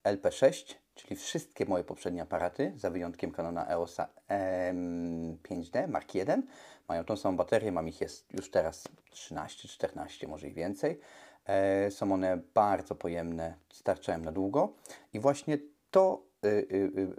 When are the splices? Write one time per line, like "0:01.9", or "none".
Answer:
none